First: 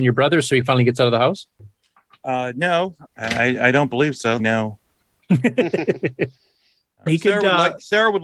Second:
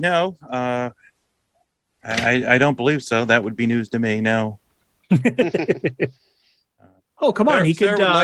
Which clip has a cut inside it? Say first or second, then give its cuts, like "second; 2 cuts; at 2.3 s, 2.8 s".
first; 3 cuts; at 3.0 s, 4.4 s, 7.1 s